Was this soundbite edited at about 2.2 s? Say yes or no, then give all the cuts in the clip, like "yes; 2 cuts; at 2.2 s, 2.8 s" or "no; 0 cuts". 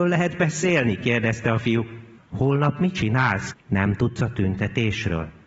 yes; 2 cuts; at 2.2 s, 3.5 s